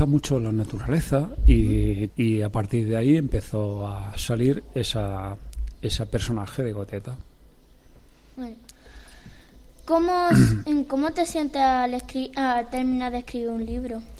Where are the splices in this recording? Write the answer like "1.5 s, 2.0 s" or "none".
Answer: 2.1 s